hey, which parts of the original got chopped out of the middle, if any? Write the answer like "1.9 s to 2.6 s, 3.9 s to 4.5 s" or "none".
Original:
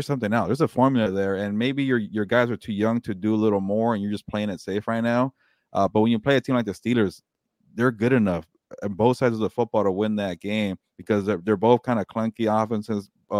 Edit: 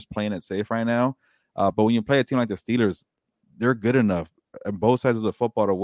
none